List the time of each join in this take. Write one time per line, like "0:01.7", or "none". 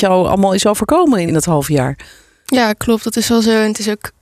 0:01.3